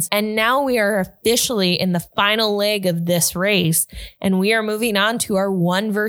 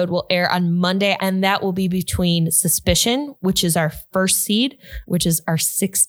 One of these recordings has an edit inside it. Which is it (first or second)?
second